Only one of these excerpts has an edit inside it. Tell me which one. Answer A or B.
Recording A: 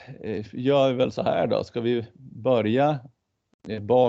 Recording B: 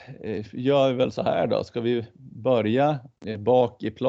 B